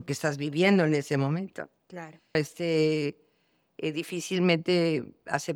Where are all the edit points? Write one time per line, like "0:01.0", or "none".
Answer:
0:02.3